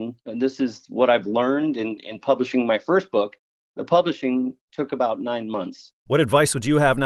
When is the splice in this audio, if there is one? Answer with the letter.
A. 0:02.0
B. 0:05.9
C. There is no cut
B